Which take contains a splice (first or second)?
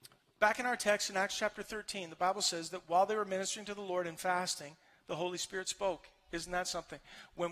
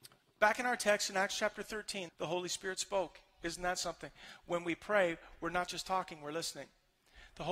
second